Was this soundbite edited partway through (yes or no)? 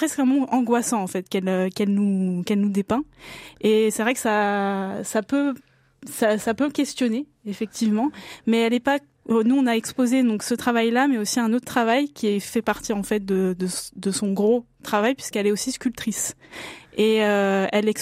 no